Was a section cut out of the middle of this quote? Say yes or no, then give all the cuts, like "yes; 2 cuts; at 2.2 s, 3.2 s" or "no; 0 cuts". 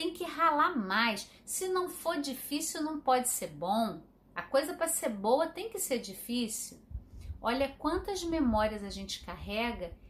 no; 0 cuts